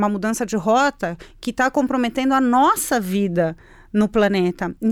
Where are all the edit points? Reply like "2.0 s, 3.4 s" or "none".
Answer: none